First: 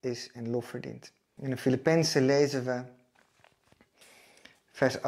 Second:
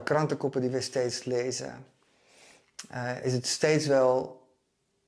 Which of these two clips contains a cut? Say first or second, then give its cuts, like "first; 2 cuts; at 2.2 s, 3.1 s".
first; 1 cut; at 1.4 s